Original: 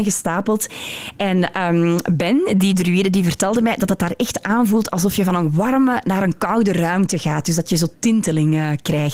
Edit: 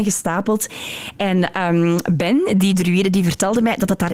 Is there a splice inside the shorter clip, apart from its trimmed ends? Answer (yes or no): no